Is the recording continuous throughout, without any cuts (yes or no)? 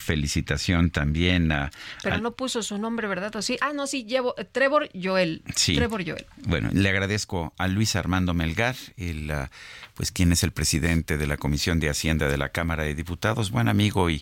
yes